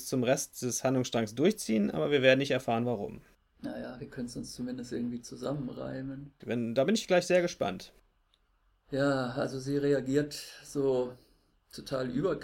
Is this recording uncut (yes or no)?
no